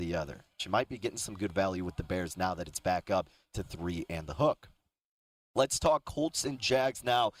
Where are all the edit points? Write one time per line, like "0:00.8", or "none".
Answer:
none